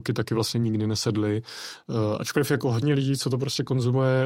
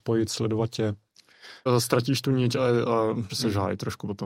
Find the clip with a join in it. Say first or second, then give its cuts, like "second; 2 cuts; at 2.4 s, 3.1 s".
second; 2 cuts; at 1.7 s, 3.3 s